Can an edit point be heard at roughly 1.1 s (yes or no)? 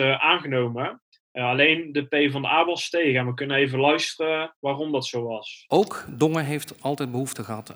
no